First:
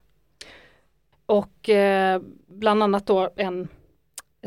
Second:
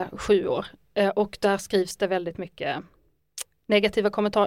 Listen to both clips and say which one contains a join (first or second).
first